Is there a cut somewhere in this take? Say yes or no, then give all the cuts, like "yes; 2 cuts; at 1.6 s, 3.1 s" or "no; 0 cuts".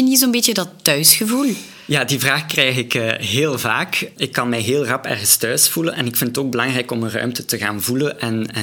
yes; 1 cut; at 4.2 s